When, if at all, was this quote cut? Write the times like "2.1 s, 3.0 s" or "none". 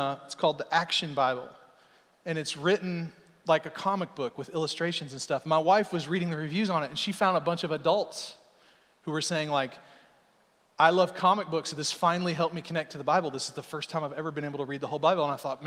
none

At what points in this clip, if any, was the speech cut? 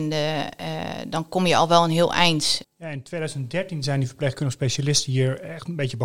2.6 s

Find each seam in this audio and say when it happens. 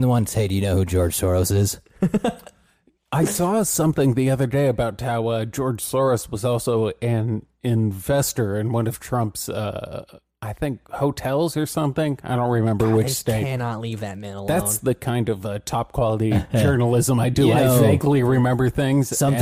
none

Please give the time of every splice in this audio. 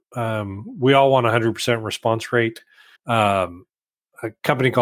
3.0 s

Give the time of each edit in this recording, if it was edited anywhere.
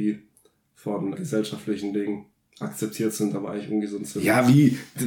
1.1 s, 2.4 s

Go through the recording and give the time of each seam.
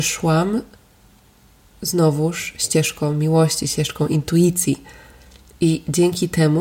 none

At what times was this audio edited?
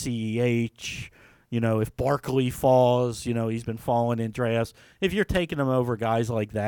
none

